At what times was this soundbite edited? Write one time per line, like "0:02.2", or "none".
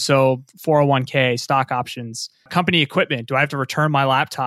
0:02.5

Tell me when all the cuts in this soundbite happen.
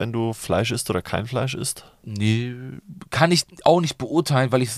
none

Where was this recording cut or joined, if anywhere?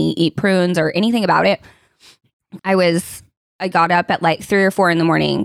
0:02.6

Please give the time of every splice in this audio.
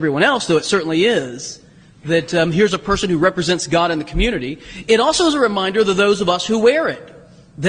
none

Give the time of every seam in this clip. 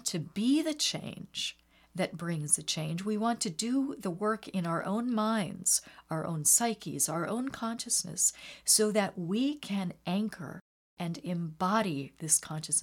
none

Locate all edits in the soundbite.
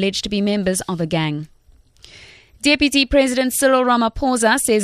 none

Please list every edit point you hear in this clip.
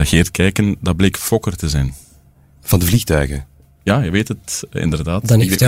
none

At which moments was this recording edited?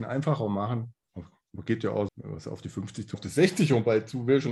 0:02.1
0:03.1

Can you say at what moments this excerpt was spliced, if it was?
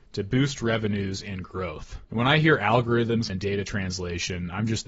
0:02.1
0:03.3

